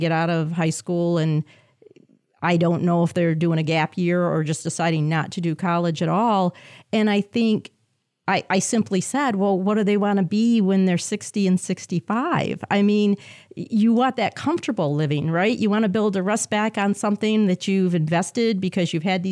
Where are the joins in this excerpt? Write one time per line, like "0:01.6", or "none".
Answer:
none